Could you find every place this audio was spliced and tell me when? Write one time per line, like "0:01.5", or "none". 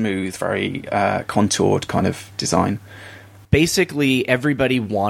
0:03.4